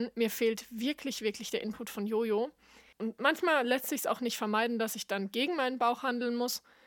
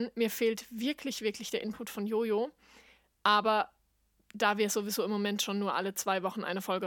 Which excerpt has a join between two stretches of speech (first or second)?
first